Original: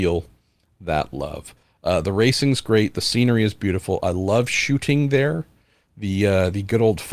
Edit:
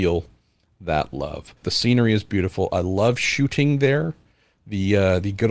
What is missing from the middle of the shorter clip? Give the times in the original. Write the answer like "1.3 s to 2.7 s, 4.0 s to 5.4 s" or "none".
1.6 s to 2.9 s